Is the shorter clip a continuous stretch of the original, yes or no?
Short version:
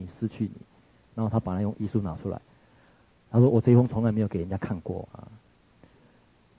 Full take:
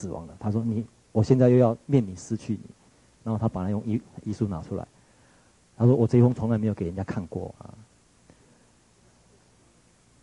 no